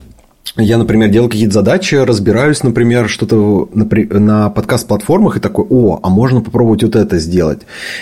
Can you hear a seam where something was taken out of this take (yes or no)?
no